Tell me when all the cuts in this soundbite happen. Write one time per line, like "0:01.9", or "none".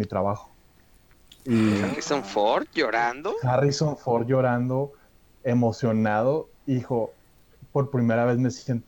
none